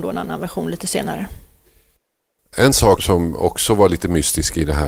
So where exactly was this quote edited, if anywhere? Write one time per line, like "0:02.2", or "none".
0:03.0